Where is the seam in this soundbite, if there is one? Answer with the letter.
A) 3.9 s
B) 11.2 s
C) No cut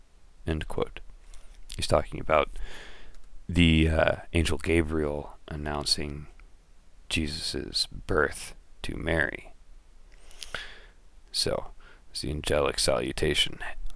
C